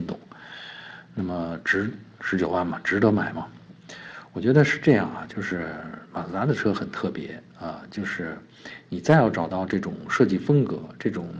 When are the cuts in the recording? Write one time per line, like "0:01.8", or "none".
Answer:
none